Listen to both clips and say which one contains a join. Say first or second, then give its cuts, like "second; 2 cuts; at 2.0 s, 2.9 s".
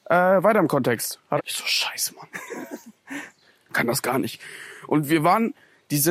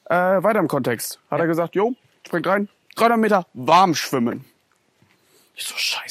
first; 1 cut; at 1.4 s